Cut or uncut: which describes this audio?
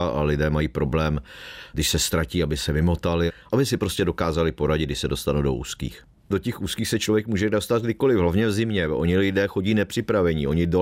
uncut